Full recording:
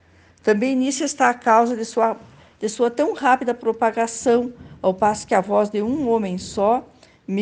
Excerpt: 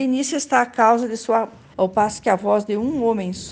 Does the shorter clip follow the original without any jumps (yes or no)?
no